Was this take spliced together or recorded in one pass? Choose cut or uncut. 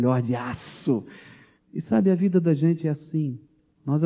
uncut